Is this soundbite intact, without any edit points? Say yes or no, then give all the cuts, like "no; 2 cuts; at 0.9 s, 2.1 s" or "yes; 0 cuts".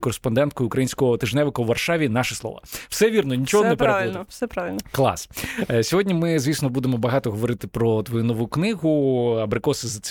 yes; 0 cuts